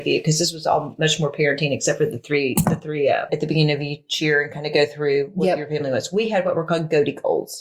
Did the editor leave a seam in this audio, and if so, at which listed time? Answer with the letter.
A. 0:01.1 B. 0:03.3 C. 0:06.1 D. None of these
B